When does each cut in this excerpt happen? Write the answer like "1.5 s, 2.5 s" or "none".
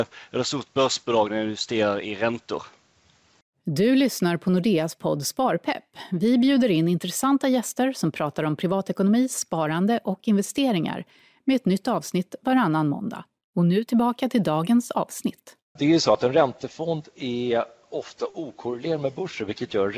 13.5 s, 15.8 s